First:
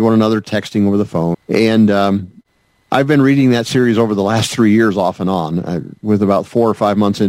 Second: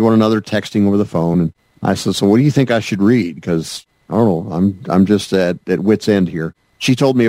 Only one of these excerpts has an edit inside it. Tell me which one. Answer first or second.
first